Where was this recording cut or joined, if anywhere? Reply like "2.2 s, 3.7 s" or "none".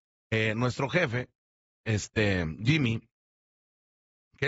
none